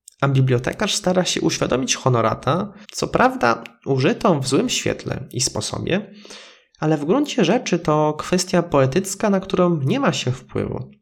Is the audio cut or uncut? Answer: cut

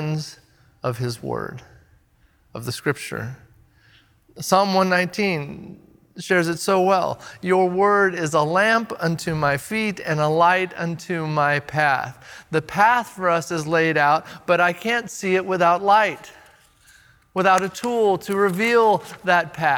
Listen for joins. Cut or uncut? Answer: uncut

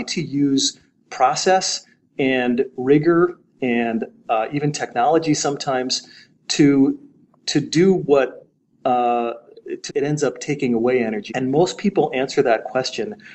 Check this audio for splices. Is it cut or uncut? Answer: cut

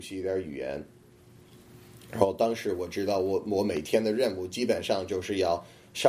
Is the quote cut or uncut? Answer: uncut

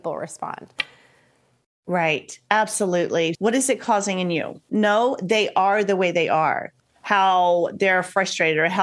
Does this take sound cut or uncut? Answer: cut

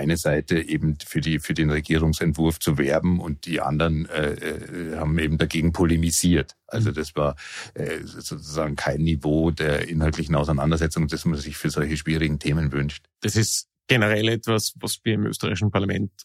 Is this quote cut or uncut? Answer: uncut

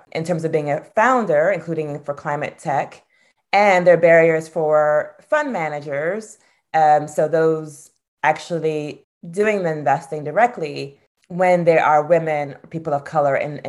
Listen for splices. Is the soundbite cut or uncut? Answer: uncut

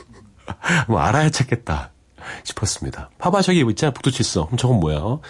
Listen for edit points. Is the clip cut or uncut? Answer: cut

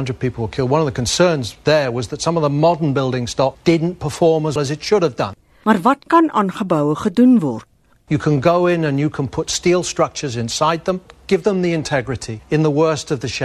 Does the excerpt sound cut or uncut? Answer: cut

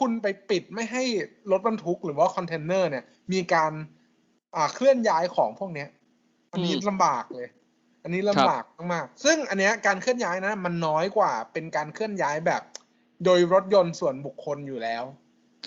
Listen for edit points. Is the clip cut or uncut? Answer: uncut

